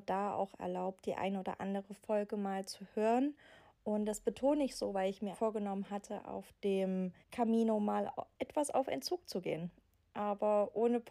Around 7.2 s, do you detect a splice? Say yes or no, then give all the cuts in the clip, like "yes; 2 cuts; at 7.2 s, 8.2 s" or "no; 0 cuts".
yes; 2 cuts; at 5.3 s, 7.2 s